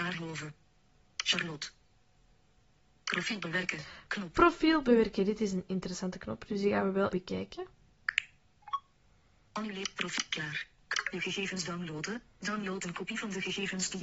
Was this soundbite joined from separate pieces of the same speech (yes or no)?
yes